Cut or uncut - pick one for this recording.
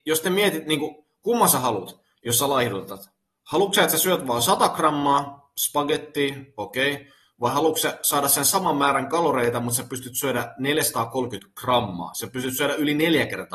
uncut